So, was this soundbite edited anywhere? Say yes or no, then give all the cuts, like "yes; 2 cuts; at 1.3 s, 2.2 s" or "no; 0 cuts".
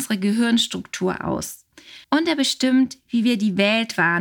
yes; 1 cut; at 2.0 s